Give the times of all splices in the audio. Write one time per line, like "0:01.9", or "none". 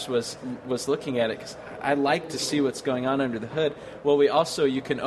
none

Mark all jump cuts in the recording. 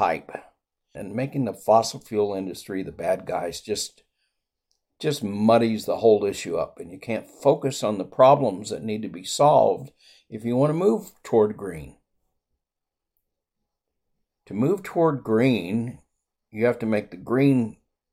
0:00.9

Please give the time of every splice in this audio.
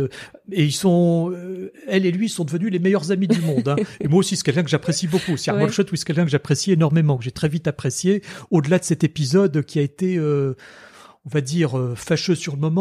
none

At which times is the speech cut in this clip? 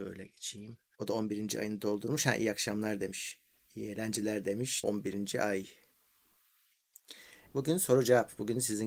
0:00.9
0:04.8
0:07.5

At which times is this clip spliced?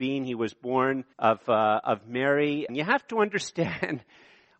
0:01.1
0:02.7

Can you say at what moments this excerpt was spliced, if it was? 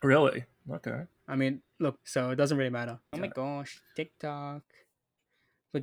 0:02.0
0:03.1

